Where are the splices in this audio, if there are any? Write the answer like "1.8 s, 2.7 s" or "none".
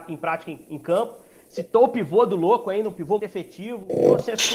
3.2 s